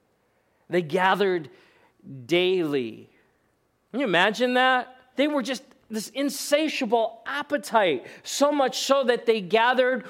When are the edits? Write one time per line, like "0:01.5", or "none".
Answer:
0:05.1